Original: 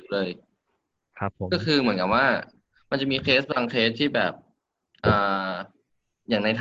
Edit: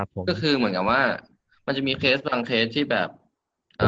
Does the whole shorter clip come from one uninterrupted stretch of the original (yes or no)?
yes